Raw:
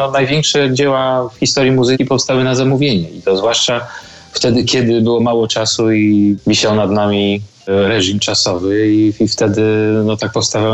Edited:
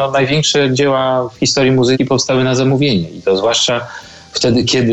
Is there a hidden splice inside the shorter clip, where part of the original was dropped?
no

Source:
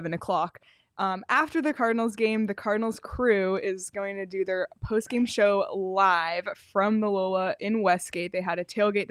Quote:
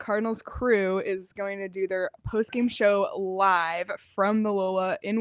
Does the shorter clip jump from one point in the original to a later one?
no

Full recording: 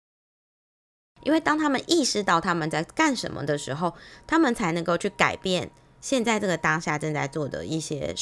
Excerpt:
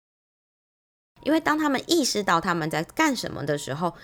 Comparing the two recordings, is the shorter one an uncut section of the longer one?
yes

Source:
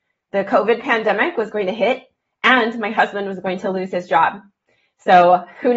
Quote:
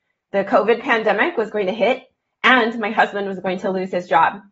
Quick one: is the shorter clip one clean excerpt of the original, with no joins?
yes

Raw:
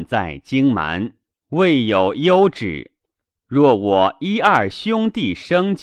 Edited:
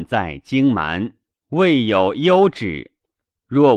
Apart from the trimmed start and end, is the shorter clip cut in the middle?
no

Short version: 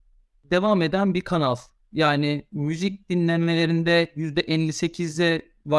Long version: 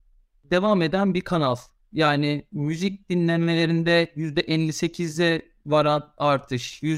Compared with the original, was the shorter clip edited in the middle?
no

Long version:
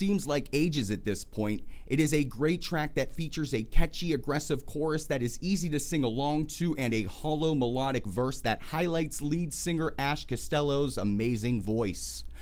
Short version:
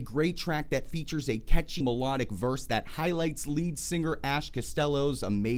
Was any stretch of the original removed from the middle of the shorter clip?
yes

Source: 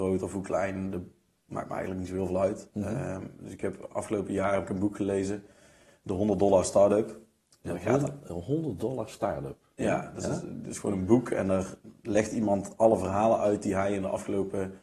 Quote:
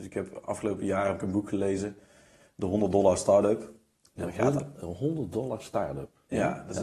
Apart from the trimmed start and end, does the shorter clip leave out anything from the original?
no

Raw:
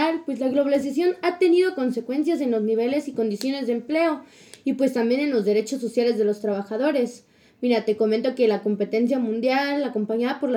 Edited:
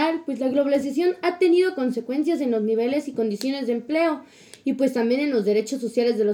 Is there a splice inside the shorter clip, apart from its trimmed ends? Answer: no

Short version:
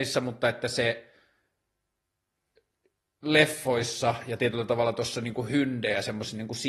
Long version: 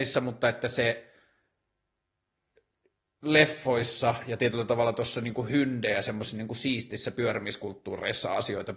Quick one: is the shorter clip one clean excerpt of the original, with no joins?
yes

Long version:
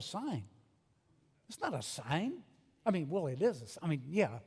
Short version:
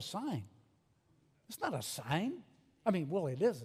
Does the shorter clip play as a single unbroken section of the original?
yes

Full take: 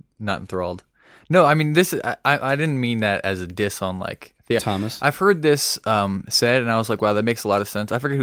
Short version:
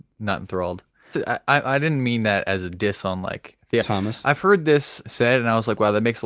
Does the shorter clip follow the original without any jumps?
no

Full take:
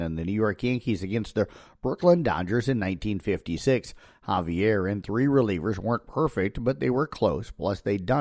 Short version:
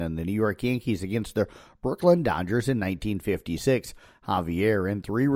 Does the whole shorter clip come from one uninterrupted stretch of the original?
yes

